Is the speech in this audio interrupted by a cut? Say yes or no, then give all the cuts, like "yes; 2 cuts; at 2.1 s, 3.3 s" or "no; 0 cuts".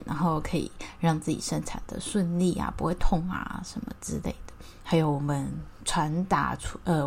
yes; 1 cut; at 4.8 s